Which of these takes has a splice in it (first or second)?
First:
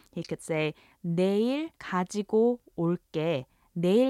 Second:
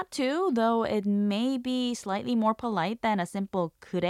first